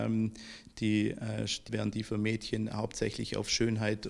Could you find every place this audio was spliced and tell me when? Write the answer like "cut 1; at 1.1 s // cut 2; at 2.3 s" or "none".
cut 1; at 1.7 s